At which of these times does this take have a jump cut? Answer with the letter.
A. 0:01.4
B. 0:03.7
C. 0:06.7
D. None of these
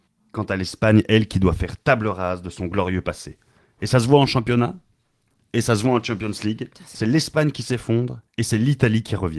D